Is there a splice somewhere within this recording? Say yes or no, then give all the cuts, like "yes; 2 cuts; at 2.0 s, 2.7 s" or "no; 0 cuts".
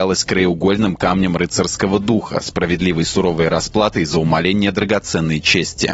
no; 0 cuts